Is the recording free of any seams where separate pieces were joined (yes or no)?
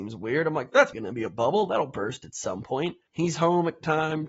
no